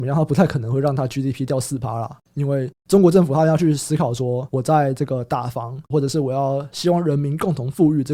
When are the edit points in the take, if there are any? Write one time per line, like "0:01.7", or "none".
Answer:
0:02.2
0:05.9